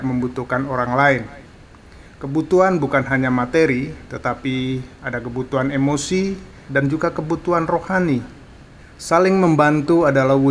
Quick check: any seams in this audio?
yes; 1 cut; at 6.7 s

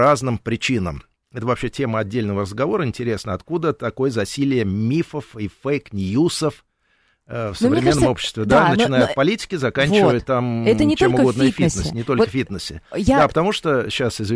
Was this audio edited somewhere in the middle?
no; 0 cuts

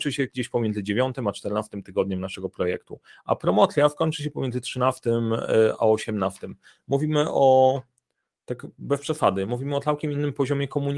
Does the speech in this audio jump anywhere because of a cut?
no; 0 cuts

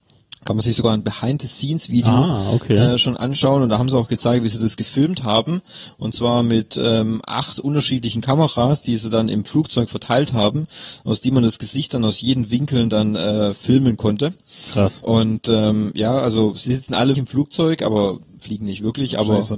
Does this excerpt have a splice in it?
yes; 1 cut; at 17.1 s

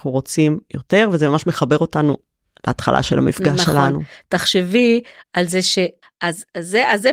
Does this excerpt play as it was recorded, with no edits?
no; 1 cut; at 6.0 s

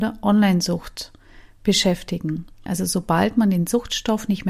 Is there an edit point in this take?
yes; 1 cut; at 2.7 s

